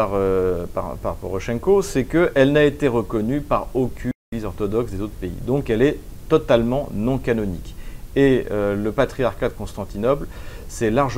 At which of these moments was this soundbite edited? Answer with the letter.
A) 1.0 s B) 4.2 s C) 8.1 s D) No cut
B